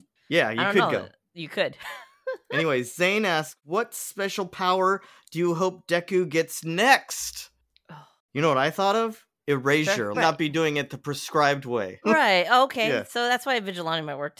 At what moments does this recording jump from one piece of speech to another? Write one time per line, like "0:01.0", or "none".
0:10.1
0:12.0